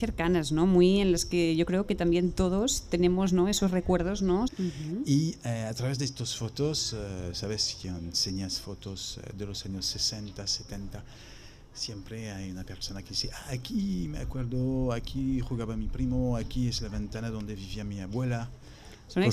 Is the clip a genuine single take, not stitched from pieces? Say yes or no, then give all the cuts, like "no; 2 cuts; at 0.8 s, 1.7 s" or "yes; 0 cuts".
no; 1 cut; at 4.5 s